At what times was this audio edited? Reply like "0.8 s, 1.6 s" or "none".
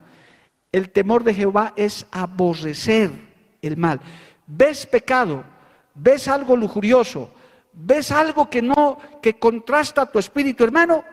none